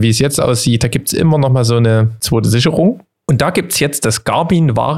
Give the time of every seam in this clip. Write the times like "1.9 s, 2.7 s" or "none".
none